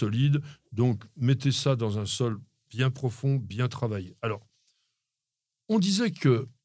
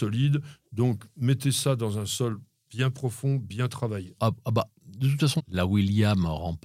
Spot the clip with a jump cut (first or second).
second